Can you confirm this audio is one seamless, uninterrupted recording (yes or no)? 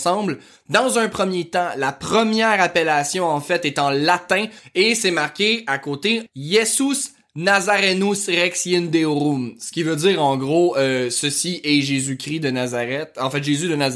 no